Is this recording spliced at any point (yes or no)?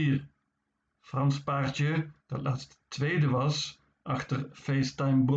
yes